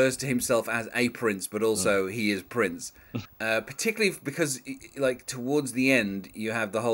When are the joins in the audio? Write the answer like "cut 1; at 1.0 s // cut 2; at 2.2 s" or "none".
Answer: cut 1; at 3.3 s

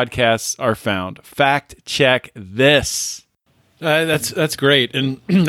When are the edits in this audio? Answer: none

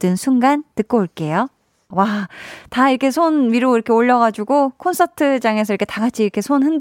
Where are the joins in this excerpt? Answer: cut 1; at 1.9 s

